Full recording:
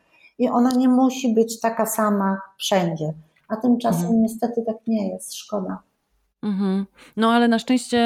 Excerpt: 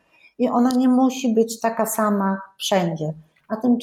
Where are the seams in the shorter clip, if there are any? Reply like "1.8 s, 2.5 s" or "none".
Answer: none